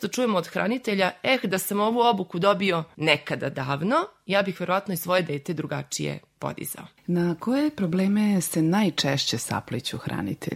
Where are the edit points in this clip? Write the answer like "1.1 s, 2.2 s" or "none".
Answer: none